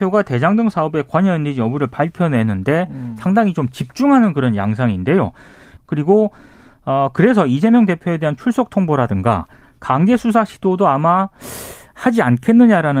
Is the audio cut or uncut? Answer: cut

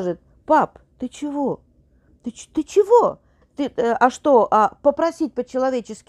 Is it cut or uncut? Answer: cut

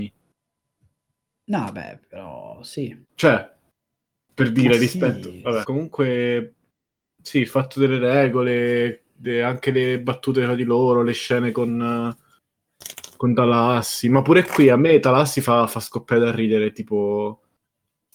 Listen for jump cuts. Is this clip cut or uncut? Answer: cut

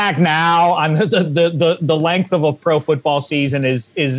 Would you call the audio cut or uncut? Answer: uncut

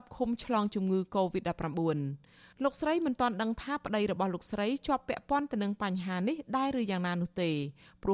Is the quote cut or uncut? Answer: uncut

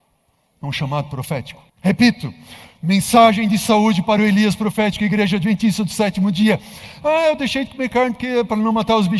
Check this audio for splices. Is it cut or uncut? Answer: cut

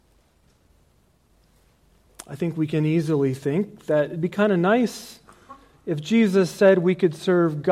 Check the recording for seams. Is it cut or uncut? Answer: uncut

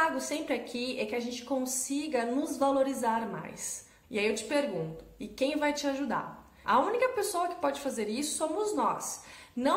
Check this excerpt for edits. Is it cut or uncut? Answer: cut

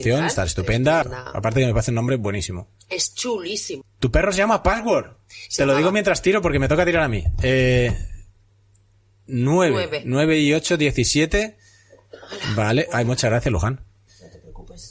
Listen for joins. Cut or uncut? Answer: cut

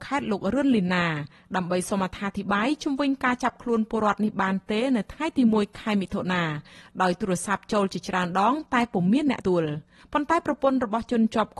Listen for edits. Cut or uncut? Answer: cut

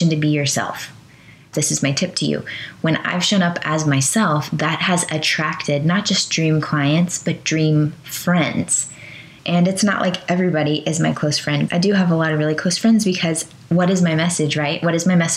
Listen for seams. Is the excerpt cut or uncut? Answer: cut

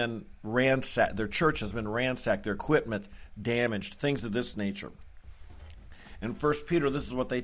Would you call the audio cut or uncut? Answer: uncut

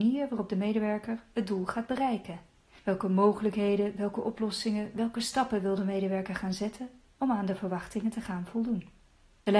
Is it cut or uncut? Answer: uncut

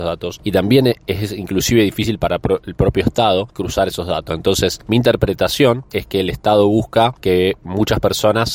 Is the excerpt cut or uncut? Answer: cut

